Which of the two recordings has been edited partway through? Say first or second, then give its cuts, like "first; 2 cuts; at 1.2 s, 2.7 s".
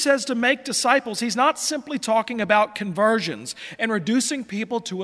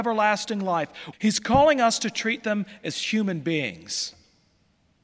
second; 1 cut; at 1.1 s